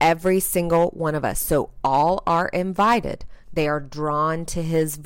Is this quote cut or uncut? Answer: cut